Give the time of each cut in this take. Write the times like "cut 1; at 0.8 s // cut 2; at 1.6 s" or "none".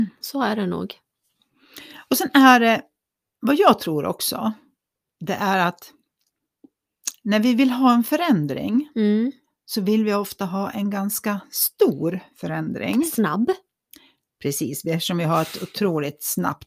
none